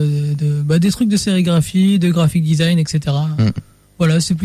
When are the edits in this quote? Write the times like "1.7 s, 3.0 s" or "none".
none